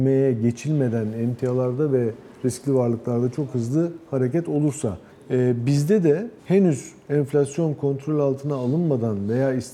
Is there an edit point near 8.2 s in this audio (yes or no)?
no